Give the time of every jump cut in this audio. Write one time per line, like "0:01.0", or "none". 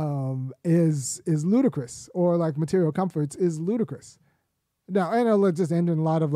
none